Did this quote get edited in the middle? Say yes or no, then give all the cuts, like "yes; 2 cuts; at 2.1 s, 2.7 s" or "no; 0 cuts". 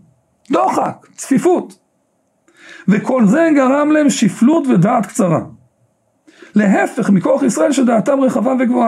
no; 0 cuts